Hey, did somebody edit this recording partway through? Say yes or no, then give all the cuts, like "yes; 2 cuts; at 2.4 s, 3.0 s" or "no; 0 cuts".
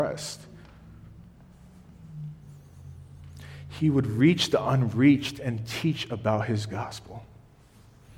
no; 0 cuts